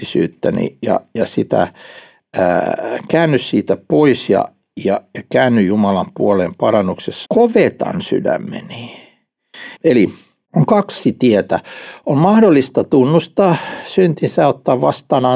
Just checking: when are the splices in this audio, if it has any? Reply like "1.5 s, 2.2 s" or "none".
7.3 s, 9.8 s